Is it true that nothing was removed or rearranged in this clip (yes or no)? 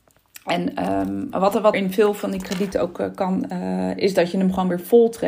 no